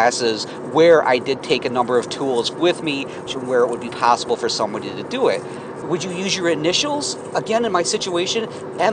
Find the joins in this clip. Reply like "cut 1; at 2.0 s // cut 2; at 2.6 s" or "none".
cut 1; at 3.3 s // cut 2; at 5.8 s